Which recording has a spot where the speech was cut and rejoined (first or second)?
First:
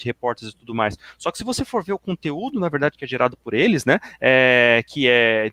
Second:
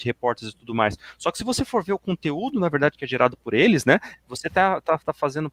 second